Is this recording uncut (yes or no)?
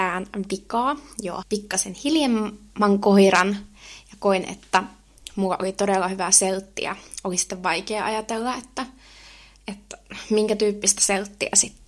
no